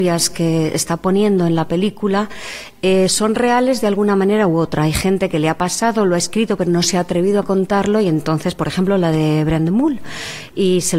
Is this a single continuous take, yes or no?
yes